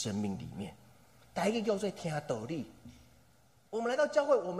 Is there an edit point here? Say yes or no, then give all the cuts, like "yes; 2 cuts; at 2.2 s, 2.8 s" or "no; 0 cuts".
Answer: yes; 1 cut; at 1.2 s